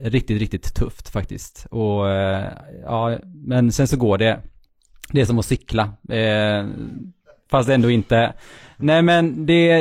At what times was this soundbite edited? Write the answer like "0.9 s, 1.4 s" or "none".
none